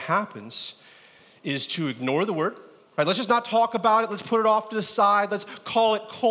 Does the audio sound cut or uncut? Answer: uncut